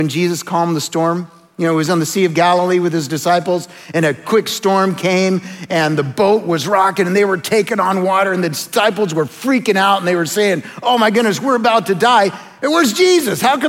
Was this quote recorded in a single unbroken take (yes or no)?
yes